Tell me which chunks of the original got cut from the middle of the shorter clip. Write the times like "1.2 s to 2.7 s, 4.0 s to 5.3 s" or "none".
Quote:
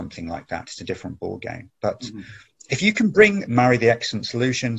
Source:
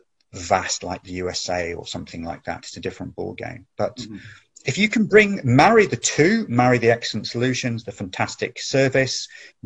5.4 s to 6.5 s